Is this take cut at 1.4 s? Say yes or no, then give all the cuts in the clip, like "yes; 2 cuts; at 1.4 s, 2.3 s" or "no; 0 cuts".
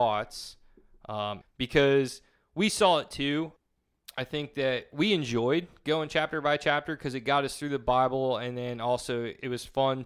yes; 1 cut; at 1.4 s